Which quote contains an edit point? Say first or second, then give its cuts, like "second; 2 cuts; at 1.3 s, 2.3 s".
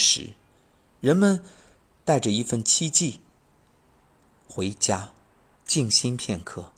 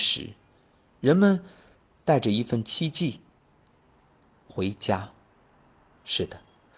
first; 1 cut; at 5.6 s